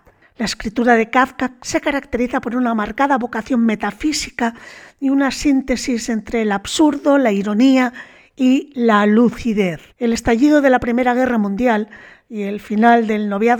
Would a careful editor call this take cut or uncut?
cut